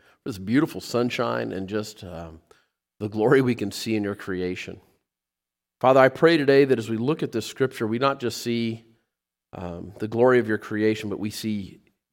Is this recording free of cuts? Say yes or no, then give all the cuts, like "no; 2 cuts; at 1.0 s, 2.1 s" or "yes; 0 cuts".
yes; 0 cuts